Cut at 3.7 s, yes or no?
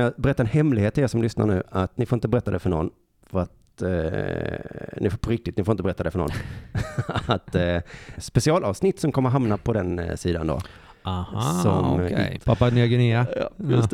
no